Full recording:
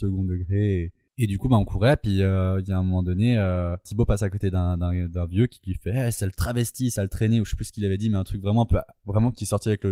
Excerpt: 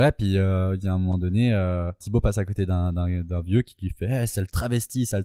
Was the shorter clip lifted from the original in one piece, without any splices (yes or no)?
yes